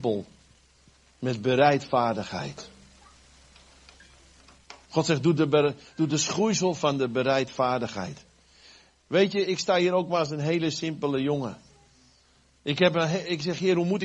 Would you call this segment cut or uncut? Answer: uncut